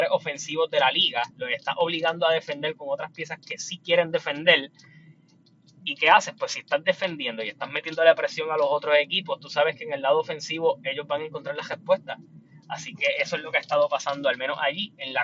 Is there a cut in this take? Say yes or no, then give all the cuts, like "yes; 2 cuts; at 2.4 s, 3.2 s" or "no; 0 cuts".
no; 0 cuts